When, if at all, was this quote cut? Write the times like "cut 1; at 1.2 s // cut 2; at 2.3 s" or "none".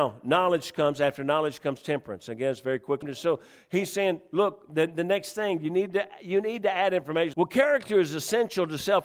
cut 1; at 3.0 s // cut 2; at 7.3 s